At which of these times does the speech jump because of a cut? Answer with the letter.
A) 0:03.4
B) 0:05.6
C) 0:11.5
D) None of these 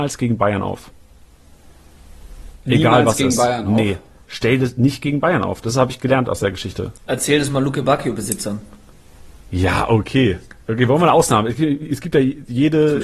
D